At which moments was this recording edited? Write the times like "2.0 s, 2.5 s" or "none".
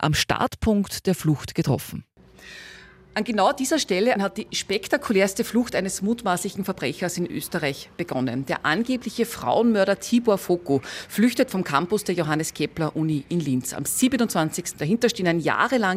4.2 s, 14.7 s

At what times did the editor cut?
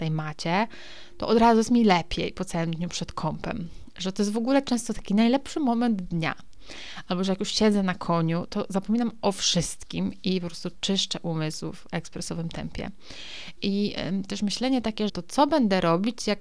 13.6 s, 15.1 s

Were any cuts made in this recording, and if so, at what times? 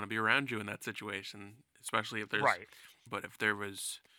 3.1 s

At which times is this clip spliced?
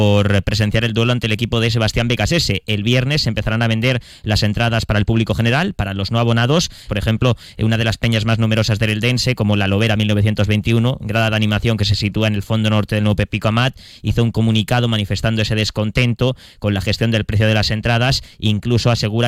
6.9 s

